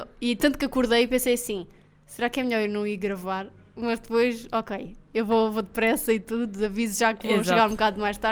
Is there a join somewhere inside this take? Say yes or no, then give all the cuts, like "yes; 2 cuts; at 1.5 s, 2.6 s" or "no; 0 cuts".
no; 0 cuts